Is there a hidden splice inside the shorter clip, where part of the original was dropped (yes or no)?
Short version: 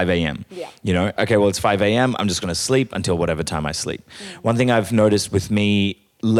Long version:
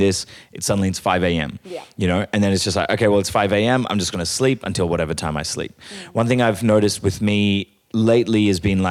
yes